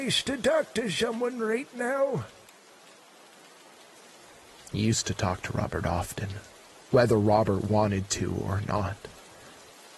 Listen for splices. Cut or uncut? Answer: uncut